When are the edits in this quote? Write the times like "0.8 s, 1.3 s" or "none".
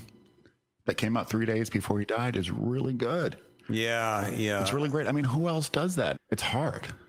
6.1 s